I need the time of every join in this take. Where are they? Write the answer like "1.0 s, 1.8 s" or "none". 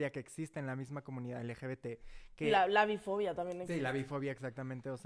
none